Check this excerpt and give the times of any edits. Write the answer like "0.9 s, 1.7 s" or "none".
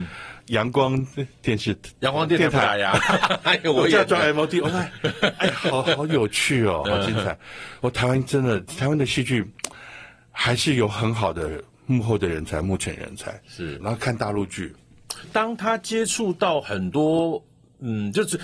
13.8 s, 15.2 s